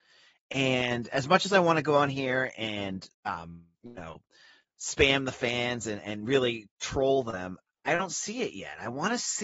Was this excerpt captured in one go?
yes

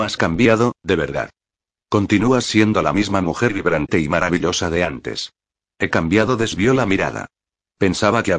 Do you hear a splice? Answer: no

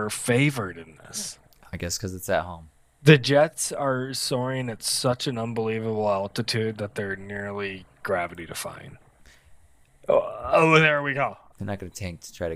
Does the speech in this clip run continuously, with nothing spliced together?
no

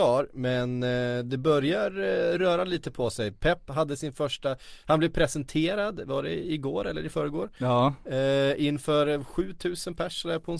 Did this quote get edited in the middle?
no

